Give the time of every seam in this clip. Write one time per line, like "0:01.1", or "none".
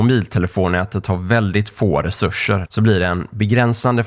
0:02.7